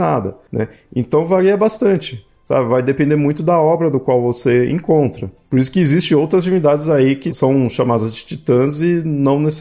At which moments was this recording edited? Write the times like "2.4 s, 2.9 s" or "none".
none